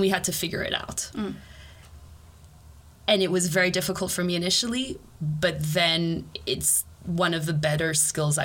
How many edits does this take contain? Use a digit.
0